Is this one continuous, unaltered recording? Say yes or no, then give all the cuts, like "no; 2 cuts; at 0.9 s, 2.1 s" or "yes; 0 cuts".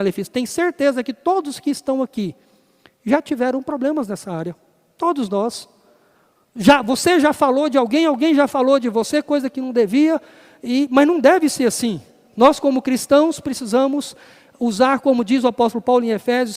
yes; 0 cuts